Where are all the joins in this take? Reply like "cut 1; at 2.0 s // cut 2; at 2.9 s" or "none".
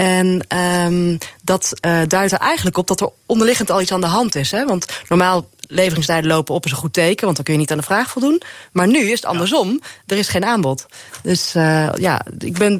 none